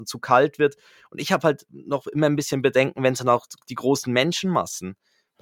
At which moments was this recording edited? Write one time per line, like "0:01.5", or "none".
none

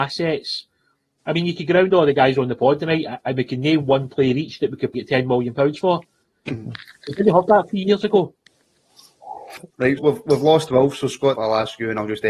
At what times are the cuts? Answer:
0:04.9
0:10.0
0:11.3

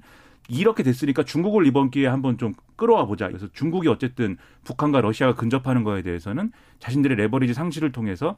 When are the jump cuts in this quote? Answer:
0:03.3

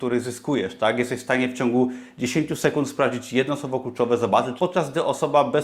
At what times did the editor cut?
0:04.6

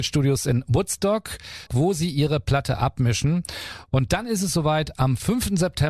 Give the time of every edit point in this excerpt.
0:01.7

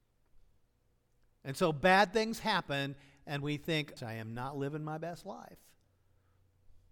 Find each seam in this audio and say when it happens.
0:04.0

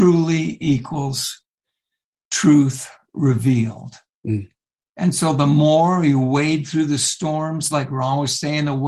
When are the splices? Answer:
0:07.7

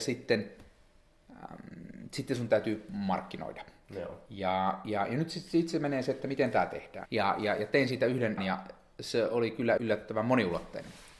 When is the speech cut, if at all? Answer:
0:07.1
0:08.4
0:09.8

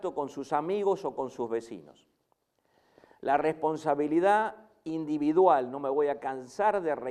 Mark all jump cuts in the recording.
none

